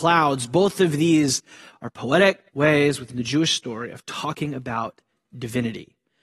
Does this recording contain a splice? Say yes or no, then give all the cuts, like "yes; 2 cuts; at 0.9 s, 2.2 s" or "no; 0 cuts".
yes; 1 cut; at 2.5 s